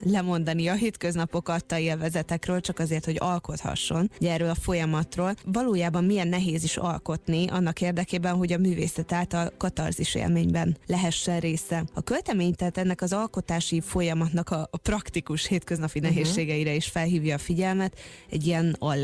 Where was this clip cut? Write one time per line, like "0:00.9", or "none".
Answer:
none